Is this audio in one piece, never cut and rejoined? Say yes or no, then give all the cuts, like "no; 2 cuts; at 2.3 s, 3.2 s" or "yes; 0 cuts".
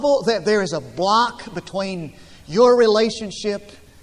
yes; 0 cuts